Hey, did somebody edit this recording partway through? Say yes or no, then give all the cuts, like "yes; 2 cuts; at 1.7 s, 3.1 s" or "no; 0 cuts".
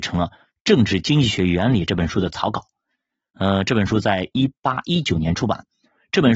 no; 0 cuts